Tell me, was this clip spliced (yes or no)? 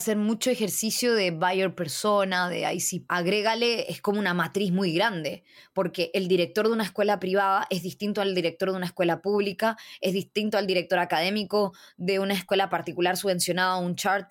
yes